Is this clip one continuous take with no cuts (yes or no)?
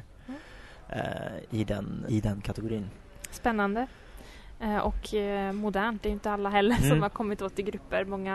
no